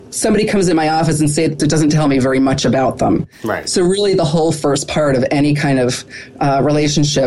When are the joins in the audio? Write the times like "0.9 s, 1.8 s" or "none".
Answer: 1.6 s